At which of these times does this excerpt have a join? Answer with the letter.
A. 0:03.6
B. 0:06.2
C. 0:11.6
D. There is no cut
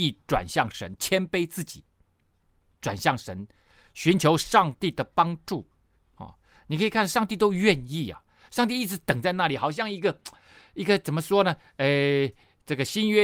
D